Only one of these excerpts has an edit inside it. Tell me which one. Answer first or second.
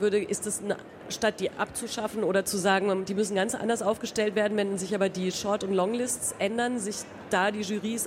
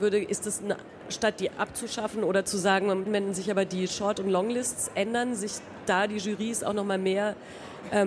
second